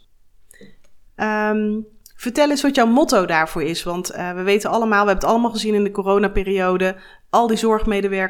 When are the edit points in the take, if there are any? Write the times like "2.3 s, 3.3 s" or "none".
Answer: 1.1 s